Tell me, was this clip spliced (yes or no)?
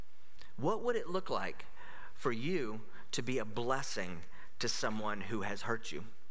no